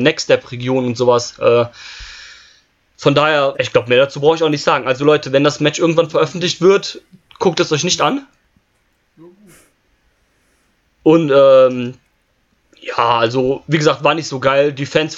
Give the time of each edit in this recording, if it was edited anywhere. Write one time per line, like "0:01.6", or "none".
0:03.5